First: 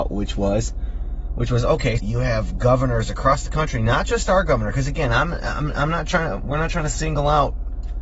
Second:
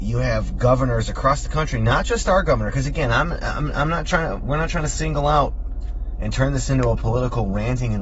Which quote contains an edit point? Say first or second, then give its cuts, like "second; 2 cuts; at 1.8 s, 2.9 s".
first; 1 cut; at 2.0 s